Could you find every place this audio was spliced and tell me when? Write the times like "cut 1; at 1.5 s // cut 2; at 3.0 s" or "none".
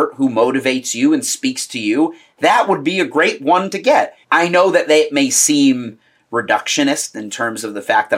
cut 1; at 4.2 s